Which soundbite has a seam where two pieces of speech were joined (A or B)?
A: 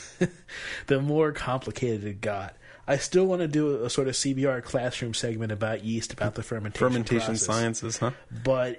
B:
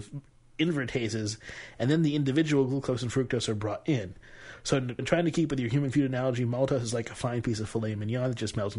B